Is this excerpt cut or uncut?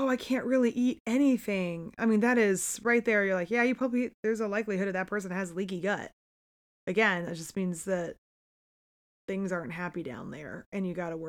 uncut